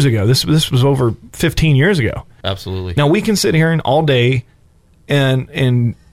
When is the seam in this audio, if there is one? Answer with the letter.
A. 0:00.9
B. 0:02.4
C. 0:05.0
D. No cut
B